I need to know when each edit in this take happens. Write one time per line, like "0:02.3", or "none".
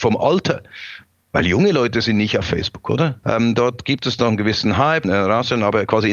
0:03.2
0:05.0